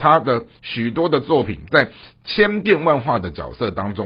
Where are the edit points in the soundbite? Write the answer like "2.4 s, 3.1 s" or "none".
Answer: none